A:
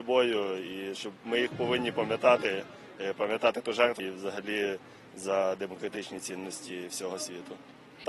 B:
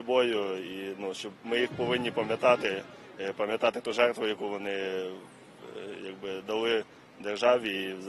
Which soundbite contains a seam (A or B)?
A